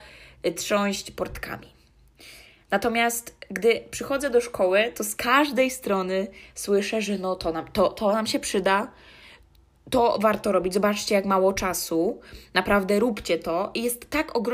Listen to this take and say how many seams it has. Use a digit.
0